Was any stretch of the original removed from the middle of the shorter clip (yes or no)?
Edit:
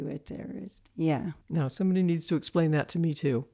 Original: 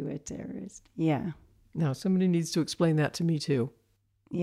yes